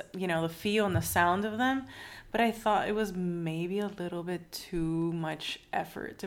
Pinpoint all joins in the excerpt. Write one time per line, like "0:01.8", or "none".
none